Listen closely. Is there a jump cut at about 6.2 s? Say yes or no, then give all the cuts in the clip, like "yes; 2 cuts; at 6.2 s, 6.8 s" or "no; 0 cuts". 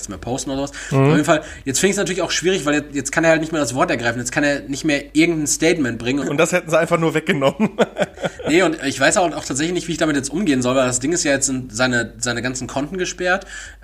yes; 1 cut; at 6.2 s